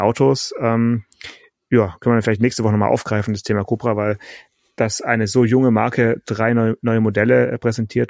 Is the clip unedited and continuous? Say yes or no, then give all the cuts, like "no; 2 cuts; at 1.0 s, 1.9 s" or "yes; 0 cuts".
yes; 0 cuts